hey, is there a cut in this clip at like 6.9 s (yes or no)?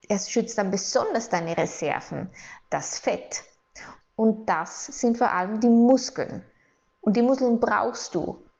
no